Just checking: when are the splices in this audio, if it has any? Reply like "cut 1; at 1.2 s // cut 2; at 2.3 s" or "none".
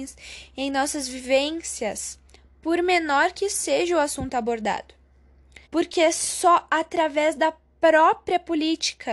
cut 1; at 5.6 s